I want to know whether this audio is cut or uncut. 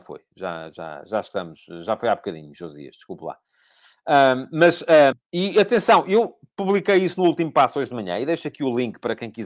cut